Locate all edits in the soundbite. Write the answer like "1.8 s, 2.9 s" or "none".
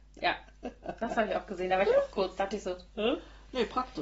none